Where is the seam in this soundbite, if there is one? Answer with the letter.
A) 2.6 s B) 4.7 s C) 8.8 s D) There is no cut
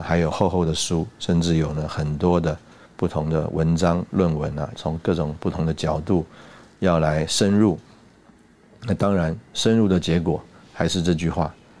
B